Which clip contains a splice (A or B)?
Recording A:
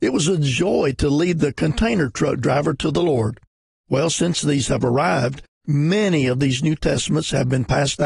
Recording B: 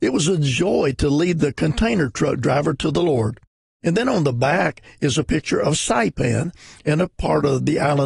B